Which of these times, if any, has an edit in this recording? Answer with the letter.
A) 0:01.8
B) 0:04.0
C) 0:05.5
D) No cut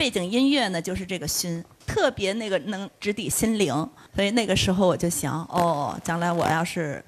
A